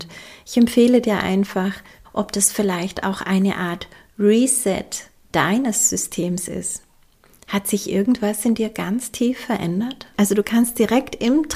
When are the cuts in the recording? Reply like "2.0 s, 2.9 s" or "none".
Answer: 2.0 s, 10.1 s